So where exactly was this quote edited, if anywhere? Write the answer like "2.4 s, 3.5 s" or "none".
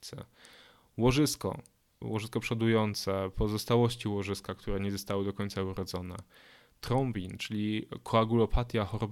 2.0 s